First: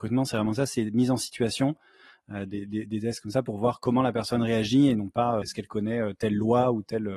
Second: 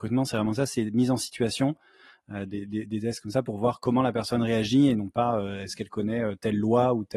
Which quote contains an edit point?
first; 1 cut; at 5.4 s

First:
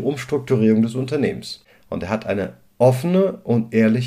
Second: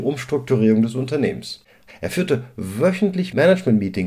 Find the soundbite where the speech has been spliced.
second; 1 cut; at 1.9 s

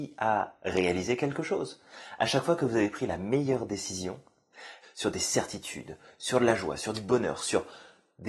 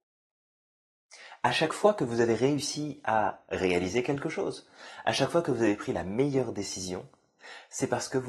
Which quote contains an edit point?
first; 2 cuts; at 4.8 s, 7.4 s

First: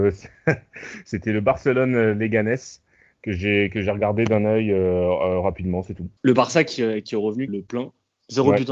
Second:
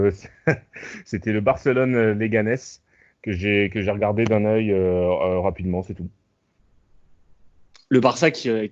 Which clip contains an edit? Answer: first; 2 cuts; at 6.2 s, 7.5 s

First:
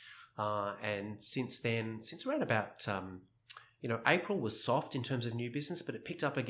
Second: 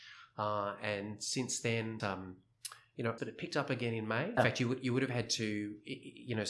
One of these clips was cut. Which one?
second; 3 cuts; at 2.0 s, 3.2 s, 4.4 s

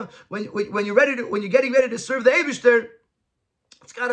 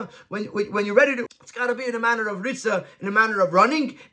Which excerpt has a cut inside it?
second; 1 cut; at 1.3 s

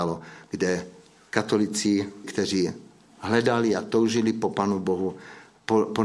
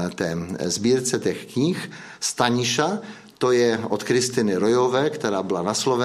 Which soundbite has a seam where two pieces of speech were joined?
first; 1 cut; at 2.2 s

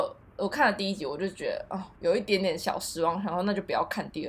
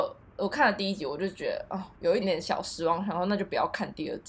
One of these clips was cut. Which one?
second; 1 cut; at 2.2 s

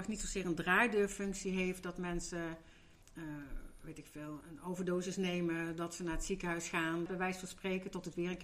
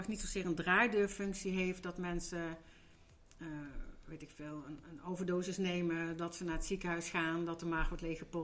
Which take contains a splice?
first; 3 cuts; at 3.0 s, 4.4 s, 7.1 s

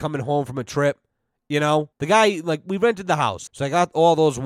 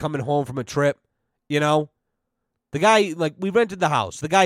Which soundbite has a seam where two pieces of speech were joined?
first; 2 cuts; at 1.9 s, 3.5 s

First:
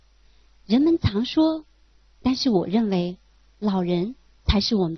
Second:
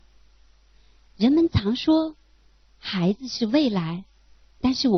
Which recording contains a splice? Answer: first; 2 cuts; at 2.1 s, 3.5 s

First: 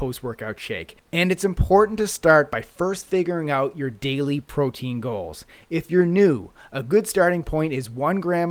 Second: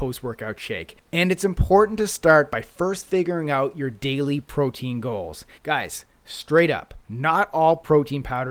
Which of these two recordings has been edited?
second; 1 cut; at 5.6 s

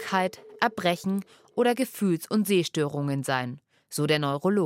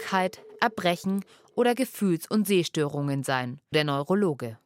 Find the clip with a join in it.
second; 1 cut; at 3.7 s

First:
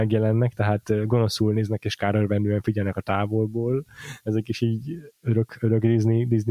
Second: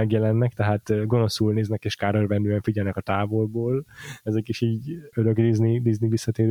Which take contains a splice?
second; 1 cut; at 5.1 s

